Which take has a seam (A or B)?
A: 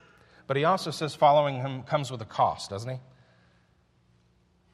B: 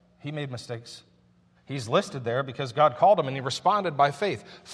B